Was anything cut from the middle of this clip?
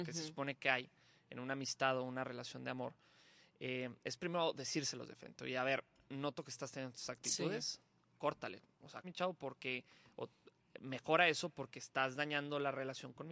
yes; 1 cut; at 9.0 s

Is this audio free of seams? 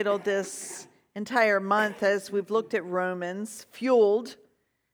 yes; 0 cuts

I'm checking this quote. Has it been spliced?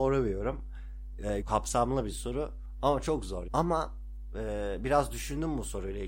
yes; 2 cuts; at 1.4 s, 3.5 s

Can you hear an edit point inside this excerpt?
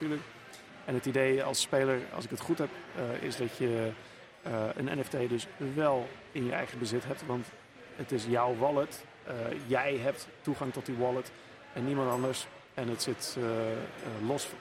no; 0 cuts

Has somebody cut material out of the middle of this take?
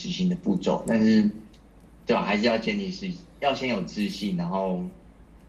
no; 0 cuts

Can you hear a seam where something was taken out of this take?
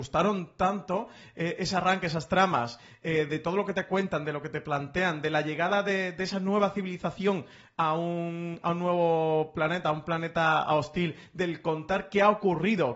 no; 0 cuts

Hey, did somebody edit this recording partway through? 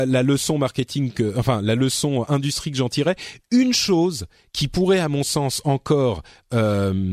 no; 0 cuts

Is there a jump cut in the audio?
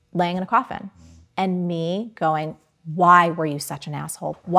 no; 0 cuts

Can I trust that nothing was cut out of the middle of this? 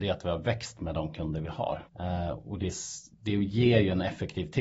no; 2 cuts; at 1.9 s, 3.1 s

